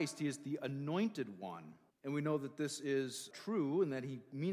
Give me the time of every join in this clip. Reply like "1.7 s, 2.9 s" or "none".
1.9 s, 3.3 s